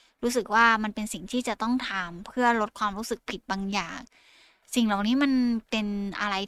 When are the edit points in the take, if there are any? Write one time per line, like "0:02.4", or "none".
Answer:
none